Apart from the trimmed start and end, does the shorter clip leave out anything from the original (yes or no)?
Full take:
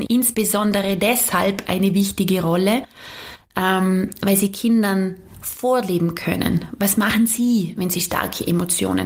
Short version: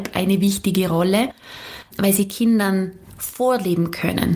yes